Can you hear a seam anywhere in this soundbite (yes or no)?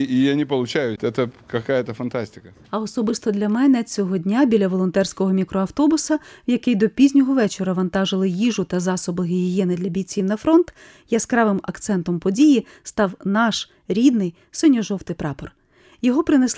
no